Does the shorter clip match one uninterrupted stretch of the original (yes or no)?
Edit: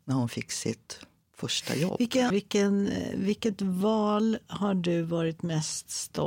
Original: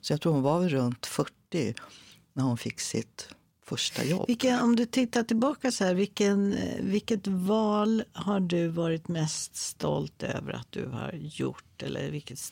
no